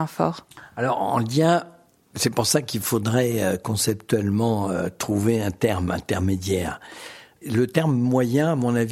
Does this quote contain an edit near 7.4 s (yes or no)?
yes